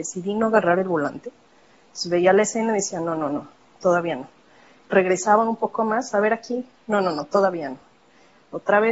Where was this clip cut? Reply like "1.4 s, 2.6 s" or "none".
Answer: none